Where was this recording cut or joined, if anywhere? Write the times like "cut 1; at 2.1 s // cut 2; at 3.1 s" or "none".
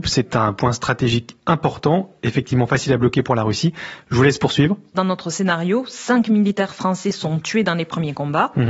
none

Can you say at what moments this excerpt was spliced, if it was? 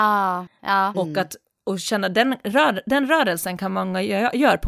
cut 1; at 0.9 s

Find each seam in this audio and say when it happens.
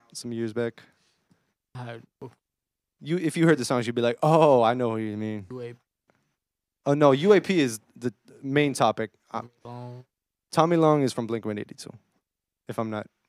none

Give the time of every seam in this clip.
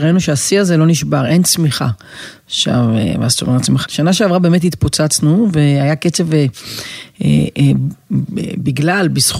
cut 1; at 3.8 s

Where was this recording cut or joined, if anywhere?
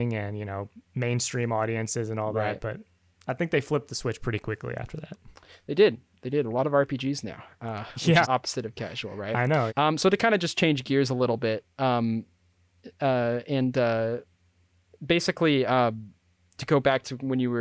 cut 1; at 8.2 s // cut 2; at 9.7 s

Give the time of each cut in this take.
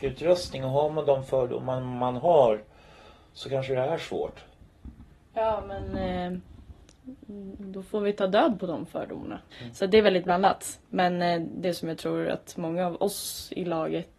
cut 1; at 9.5 s

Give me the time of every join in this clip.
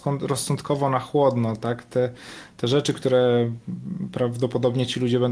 none

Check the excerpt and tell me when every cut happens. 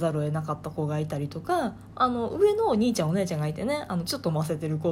cut 1; at 1.9 s

